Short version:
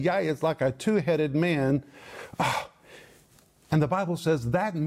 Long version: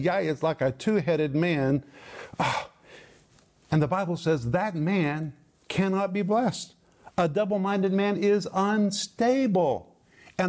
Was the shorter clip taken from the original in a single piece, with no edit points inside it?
yes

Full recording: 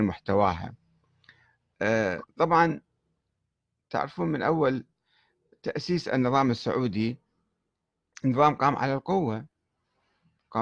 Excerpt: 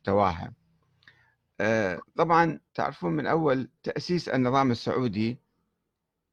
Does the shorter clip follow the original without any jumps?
no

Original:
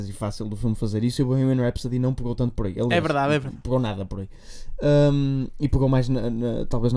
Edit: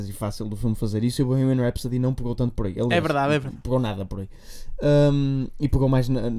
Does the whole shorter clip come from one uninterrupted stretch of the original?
yes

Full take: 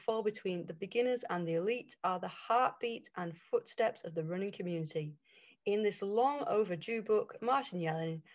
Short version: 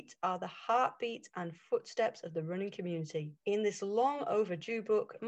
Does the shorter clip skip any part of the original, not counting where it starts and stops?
yes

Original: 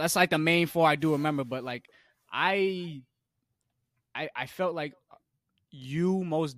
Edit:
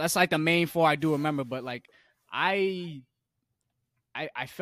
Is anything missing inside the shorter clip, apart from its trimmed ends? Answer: no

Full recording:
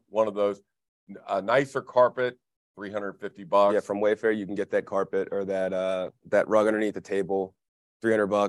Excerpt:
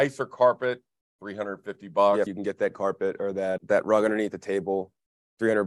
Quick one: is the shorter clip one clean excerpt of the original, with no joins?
no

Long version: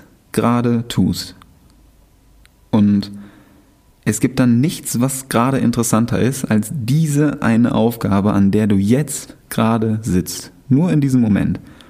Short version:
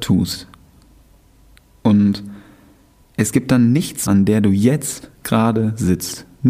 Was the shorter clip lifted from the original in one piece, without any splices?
no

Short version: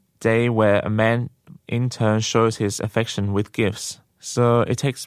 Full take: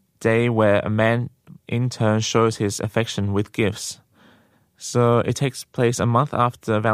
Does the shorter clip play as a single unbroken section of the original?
no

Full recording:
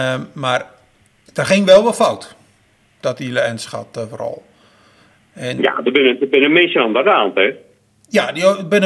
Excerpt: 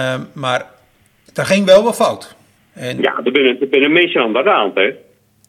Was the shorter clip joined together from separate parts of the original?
yes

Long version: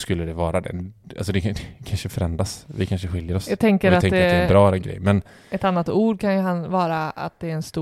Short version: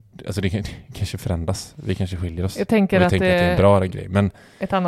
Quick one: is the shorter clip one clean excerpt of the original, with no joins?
yes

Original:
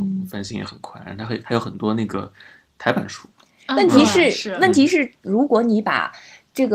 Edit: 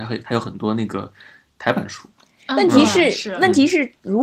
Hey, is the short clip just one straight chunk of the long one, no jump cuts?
yes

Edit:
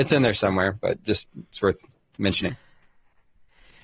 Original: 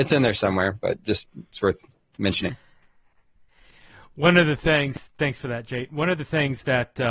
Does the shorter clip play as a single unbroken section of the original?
yes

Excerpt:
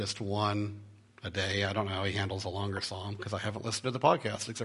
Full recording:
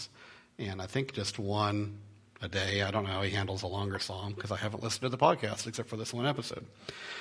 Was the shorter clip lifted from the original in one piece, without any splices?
yes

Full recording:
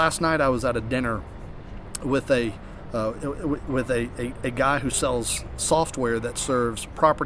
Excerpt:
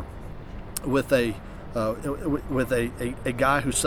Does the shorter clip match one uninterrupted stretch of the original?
yes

